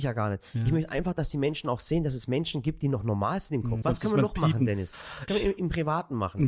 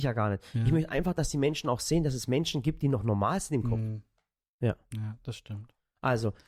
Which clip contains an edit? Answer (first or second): first